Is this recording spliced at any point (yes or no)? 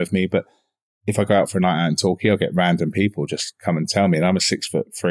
no